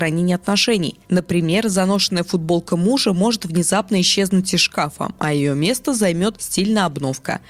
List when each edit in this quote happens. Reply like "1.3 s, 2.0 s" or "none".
none